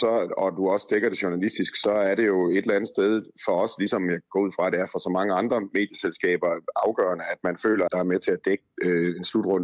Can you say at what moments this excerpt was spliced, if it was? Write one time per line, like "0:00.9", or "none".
0:07.9